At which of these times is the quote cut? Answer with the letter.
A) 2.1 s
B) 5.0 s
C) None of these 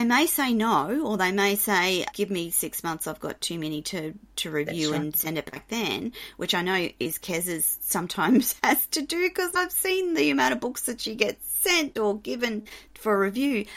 A